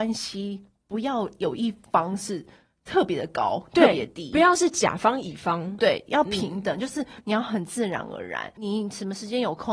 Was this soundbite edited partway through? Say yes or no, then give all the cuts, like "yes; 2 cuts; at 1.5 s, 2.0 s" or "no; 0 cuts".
yes; 1 cut; at 5.8 s